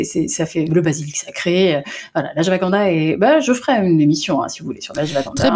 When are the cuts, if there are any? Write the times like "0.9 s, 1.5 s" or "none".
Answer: none